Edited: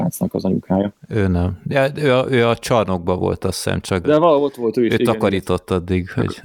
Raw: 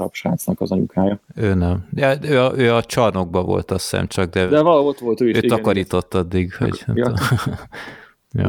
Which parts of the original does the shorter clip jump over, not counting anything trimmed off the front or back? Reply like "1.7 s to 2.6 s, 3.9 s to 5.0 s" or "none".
4.3 s to 4.5 s